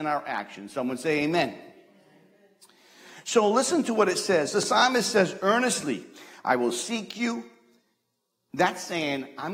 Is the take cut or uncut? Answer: uncut